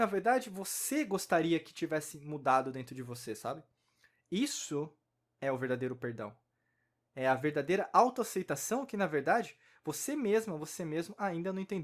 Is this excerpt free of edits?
yes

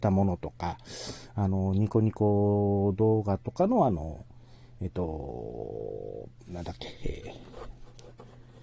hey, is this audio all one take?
yes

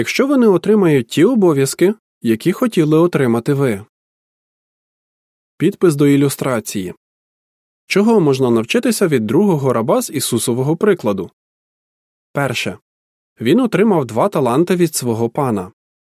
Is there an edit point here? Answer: no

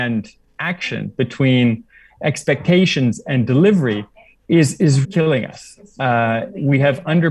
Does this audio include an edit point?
yes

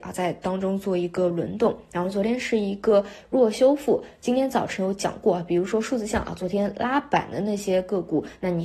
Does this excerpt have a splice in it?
no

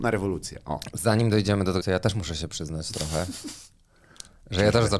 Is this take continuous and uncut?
no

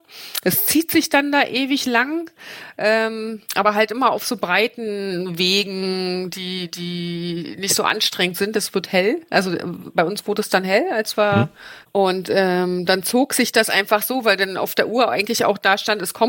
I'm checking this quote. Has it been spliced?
yes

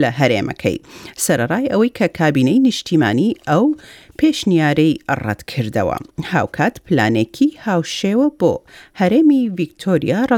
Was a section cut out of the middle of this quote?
no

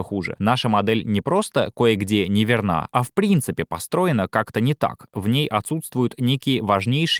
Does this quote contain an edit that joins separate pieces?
no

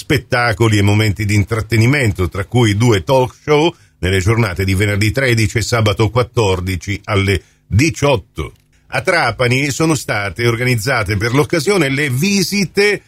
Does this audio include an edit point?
yes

